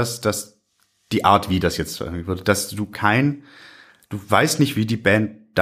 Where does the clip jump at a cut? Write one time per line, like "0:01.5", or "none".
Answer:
0:02.9